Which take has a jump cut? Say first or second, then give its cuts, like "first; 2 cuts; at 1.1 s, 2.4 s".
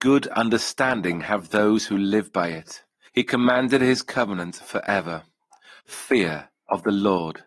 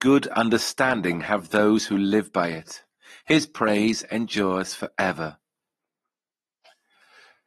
first; 2 cuts; at 3.1 s, 5.8 s